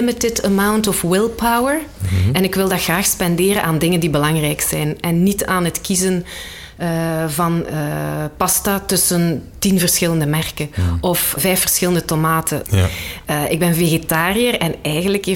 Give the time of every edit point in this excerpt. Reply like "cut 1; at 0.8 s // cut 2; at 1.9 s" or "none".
cut 1; at 11.4 s // cut 2; at 12.6 s